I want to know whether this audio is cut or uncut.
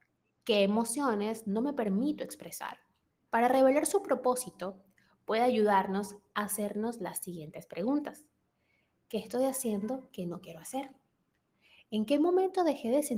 cut